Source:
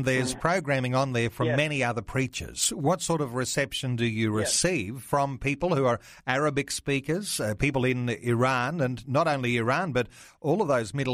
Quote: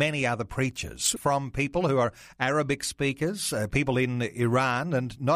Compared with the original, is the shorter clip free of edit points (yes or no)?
no